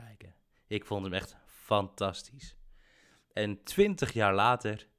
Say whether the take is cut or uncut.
uncut